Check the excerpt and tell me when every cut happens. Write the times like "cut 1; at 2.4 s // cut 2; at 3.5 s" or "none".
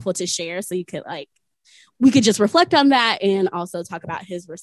none